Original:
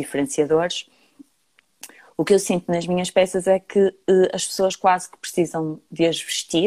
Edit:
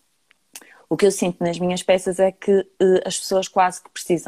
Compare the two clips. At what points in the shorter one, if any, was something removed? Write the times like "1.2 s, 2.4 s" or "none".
none